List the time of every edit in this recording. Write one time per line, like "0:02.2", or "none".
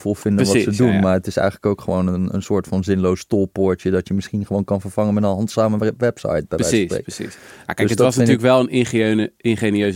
none